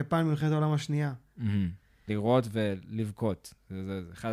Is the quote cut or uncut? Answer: cut